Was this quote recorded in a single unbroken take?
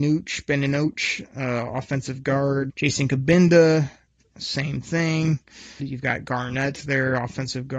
no; 2 cuts; at 2.7 s, 5.8 s

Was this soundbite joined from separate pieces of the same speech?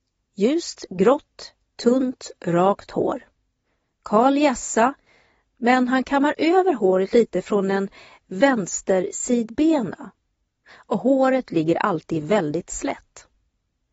no; 0 cuts

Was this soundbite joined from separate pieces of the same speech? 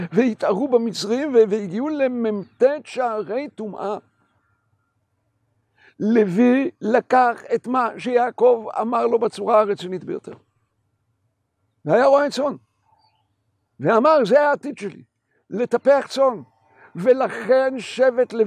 no; 0 cuts

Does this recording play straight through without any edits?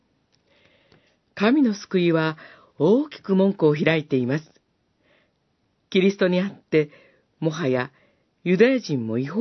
yes; 0 cuts

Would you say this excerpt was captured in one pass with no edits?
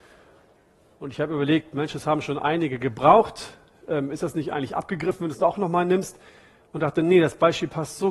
yes; 0 cuts

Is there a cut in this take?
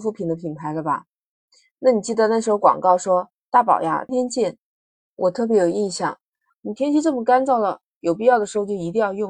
yes; 2 cuts; at 4.1 s, 6.5 s

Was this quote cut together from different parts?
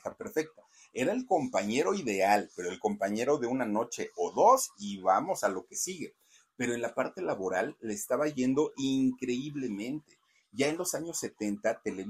no; 0 cuts

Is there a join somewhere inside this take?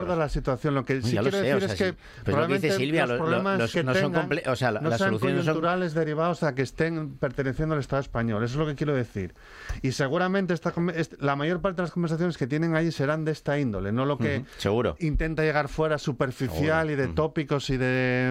no; 0 cuts

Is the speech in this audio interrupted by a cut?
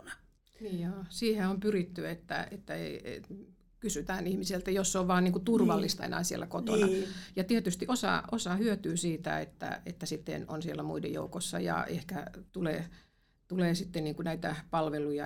yes; 1 cut; at 12.5 s

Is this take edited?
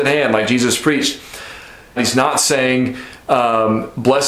yes; 1 cut; at 2.0 s

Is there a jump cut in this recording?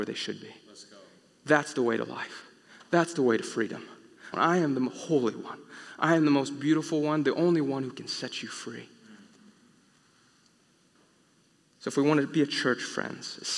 yes; 1 cut; at 4.3 s

